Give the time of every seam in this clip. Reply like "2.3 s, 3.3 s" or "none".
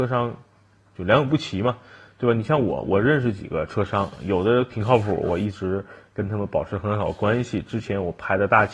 none